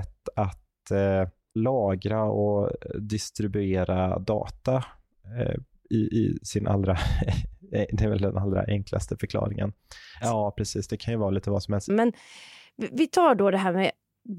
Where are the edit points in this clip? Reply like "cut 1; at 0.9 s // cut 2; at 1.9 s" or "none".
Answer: cut 1; at 10.2 s // cut 2; at 11.9 s